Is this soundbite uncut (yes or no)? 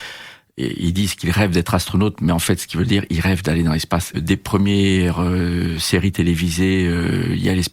no